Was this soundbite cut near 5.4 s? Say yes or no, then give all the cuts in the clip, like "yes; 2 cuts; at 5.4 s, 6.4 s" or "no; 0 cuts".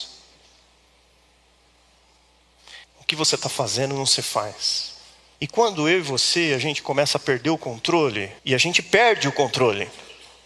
yes; 3 cuts; at 2.8 s, 5.4 s, 8.4 s